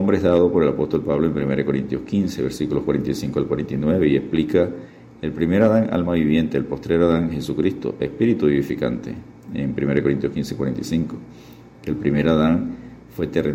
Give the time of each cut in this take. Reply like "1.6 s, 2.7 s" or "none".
none